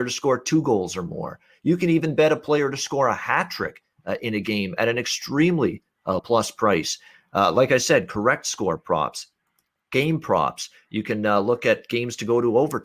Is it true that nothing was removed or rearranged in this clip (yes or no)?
no